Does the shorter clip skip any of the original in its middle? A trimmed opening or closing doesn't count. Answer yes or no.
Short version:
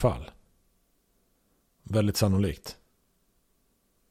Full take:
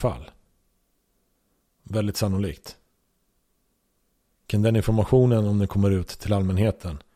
no